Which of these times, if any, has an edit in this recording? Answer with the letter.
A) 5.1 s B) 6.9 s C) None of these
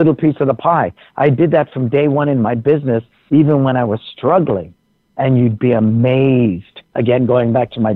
B